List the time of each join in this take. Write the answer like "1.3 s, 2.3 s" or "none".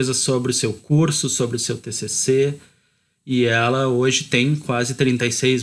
none